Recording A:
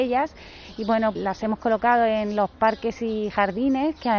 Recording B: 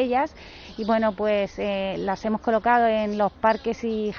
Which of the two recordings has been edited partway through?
A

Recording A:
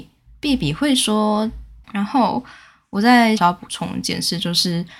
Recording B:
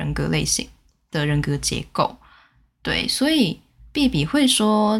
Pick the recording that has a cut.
A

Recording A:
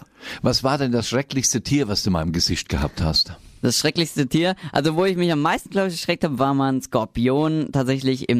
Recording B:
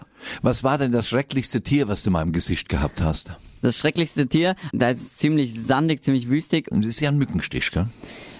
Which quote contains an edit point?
B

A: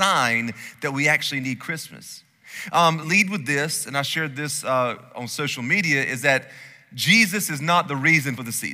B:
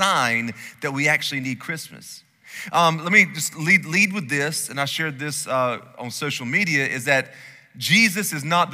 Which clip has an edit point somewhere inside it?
A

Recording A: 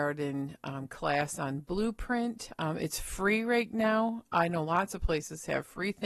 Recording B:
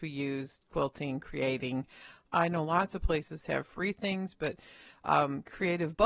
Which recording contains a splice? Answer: B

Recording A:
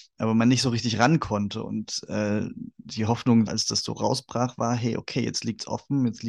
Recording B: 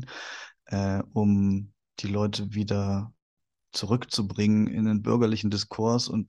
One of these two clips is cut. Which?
A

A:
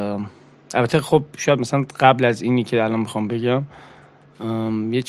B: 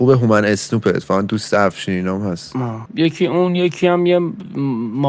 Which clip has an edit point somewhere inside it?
B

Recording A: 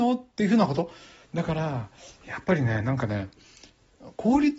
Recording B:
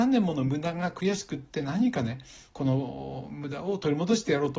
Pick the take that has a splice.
A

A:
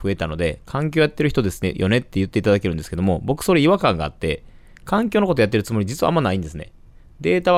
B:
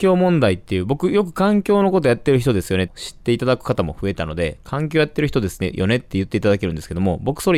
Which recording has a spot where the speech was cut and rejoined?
B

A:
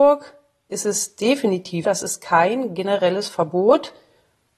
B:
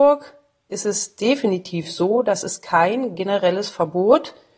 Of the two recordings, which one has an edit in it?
A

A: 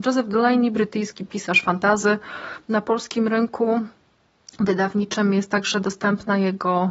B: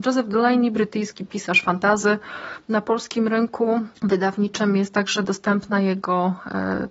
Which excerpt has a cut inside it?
B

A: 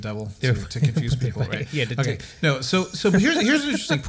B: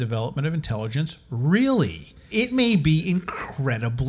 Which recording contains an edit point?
B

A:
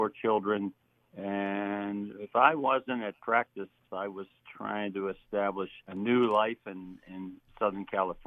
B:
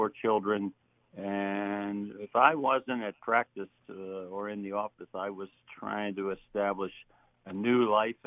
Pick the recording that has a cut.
A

